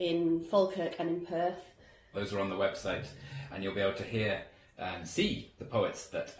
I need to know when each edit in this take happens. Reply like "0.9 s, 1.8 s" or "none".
2.1 s, 3.5 s